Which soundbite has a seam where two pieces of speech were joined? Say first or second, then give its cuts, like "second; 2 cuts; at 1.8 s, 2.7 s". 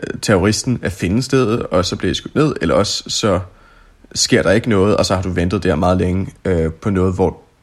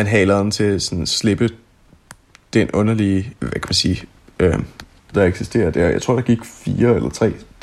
second; 2 cuts; at 3.4 s, 5.1 s